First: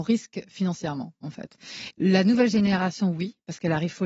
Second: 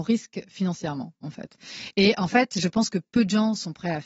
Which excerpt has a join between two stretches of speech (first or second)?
first